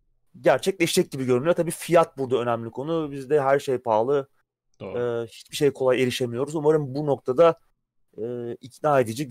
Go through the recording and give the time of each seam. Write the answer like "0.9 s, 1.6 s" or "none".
none